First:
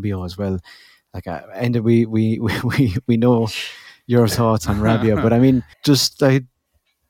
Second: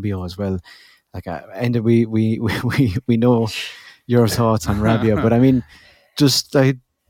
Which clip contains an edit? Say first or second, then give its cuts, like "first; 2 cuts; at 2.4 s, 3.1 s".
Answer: first; 1 cut; at 5.7 s